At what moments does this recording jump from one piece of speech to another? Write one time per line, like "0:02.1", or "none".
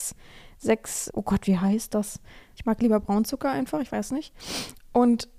0:01.1
0:02.5